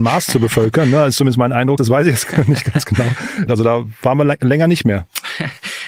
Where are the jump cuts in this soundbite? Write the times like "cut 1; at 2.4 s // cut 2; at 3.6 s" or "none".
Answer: cut 1; at 1.8 s // cut 2; at 3.5 s